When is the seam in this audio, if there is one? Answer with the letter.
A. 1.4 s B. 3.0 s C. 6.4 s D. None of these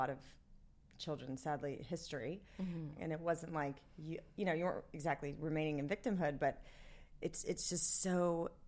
B